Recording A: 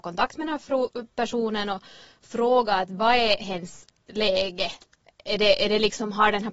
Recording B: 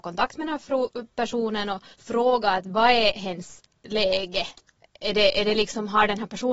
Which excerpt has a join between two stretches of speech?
B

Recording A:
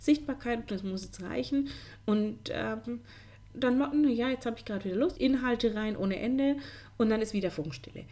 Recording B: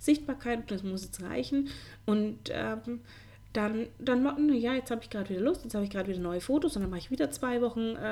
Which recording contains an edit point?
A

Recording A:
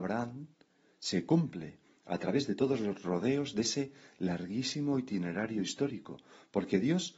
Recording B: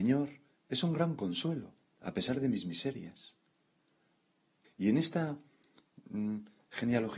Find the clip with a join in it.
B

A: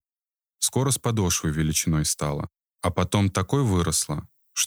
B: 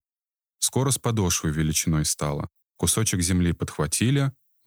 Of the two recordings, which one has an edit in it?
B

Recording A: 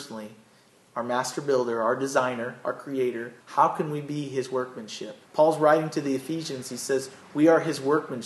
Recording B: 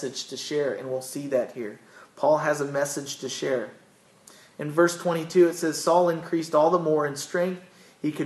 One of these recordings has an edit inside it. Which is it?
A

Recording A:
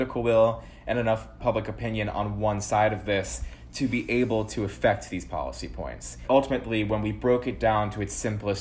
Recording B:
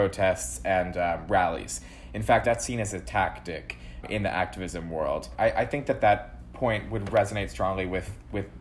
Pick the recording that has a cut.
B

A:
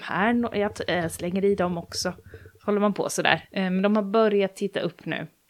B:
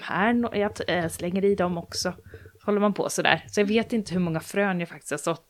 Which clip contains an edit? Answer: A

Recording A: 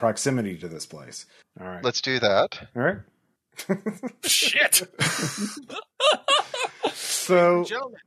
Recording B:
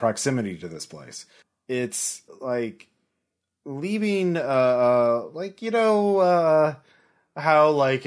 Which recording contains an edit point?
A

